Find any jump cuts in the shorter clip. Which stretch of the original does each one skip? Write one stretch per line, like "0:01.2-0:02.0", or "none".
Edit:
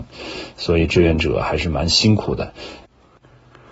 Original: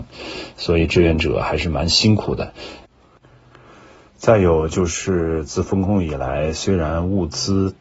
none